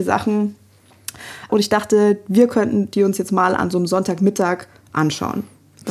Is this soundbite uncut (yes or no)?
no